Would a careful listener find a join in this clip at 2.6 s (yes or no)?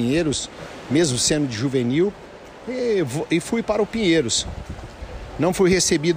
no